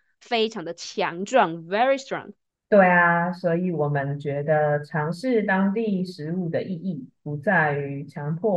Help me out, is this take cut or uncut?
cut